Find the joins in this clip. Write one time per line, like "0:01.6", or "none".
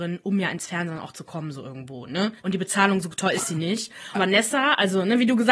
0:02.4
0:04.1